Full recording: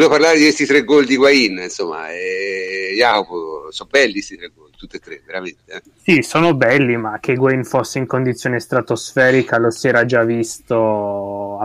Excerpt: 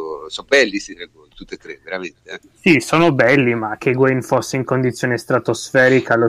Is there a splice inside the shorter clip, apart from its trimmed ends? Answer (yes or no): no